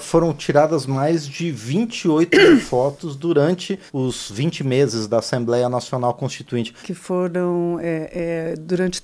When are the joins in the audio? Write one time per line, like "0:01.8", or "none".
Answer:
0:03.9
0:06.8